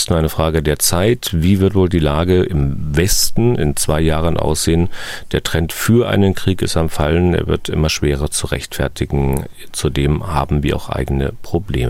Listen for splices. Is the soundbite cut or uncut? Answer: uncut